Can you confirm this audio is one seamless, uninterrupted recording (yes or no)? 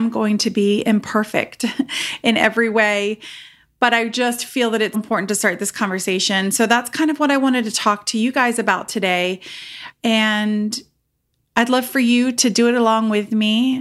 no